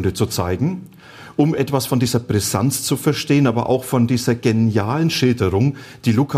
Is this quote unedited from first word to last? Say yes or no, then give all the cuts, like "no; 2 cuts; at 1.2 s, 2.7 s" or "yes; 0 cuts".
yes; 0 cuts